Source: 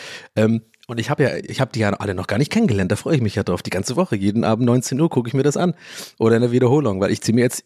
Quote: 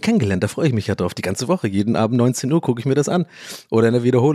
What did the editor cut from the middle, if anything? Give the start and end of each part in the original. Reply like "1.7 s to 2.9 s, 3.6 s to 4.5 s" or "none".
none